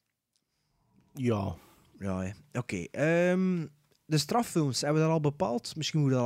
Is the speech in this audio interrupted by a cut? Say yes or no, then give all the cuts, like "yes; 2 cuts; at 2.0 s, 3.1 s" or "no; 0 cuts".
no; 0 cuts